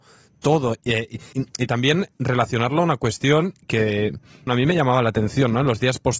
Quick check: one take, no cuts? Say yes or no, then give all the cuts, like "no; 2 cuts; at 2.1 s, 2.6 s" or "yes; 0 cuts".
no; 2 cuts; at 1.3 s, 4.5 s